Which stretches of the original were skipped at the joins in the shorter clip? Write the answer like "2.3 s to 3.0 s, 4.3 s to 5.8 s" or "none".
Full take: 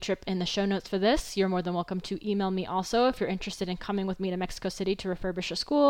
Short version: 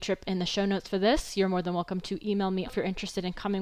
2.7 s to 3.1 s